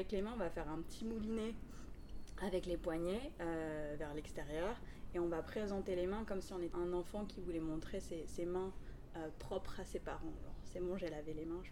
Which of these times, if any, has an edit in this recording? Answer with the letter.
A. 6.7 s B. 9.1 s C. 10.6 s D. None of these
A